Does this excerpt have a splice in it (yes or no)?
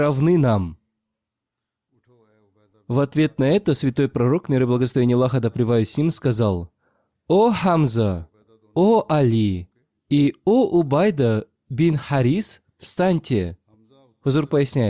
no